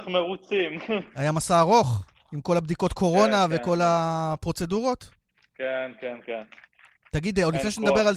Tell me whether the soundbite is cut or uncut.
uncut